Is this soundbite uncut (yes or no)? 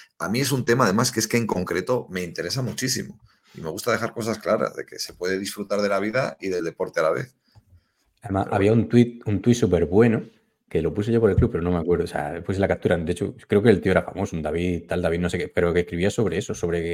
yes